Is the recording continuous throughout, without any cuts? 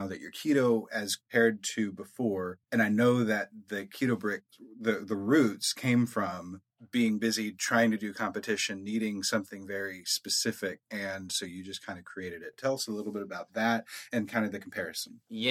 yes; 0 cuts

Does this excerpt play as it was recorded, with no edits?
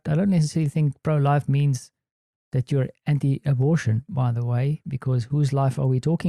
no; 1 cut; at 2.3 s

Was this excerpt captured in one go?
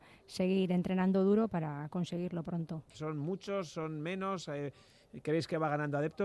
no; 1 cut; at 2.9 s

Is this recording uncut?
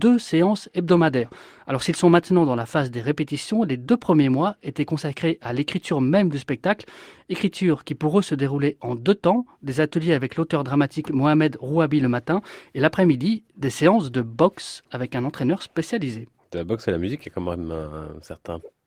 yes; 0 cuts

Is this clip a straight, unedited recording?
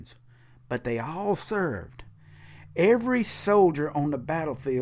yes; 0 cuts

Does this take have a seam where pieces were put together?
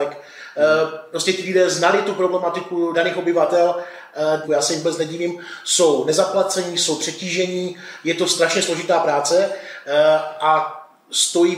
yes; 2 cuts; at 2.9 s, 4.4 s

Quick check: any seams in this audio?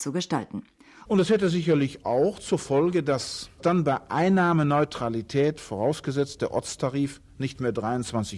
yes; 1 cut; at 1.0 s

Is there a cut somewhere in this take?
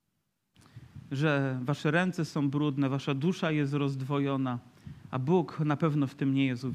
no; 0 cuts

